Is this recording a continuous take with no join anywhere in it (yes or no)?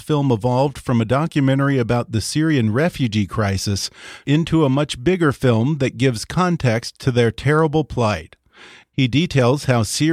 yes